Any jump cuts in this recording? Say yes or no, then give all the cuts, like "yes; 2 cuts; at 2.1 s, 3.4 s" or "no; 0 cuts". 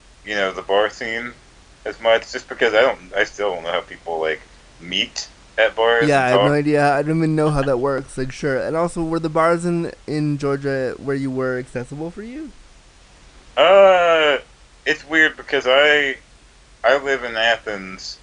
no; 0 cuts